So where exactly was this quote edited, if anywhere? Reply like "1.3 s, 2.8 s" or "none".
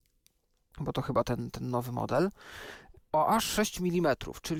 none